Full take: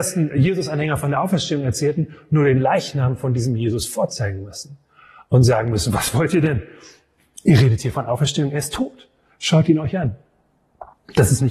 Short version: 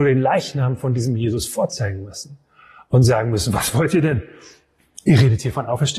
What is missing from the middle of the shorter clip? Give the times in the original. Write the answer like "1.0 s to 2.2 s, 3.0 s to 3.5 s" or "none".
none